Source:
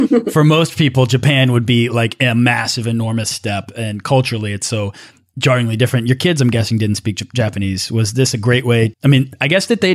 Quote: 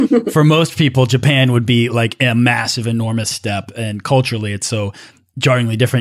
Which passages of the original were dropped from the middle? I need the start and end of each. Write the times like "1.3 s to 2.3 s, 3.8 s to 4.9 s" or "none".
none